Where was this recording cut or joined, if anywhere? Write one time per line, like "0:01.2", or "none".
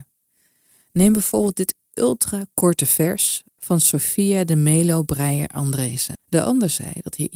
0:06.1